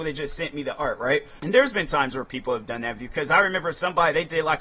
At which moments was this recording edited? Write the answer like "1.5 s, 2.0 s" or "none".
1.4 s